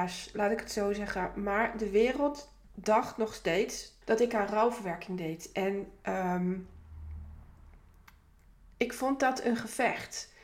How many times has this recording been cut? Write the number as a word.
one